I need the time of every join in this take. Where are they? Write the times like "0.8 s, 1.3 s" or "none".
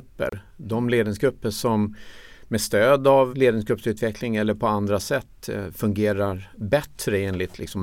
3.3 s